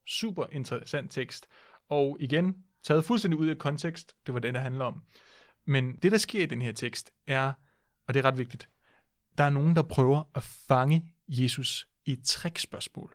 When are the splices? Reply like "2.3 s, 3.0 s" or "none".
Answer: 4.2 s